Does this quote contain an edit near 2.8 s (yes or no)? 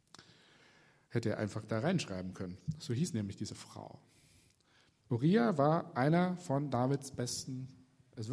no